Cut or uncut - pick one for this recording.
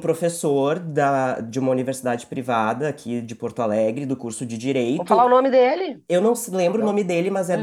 uncut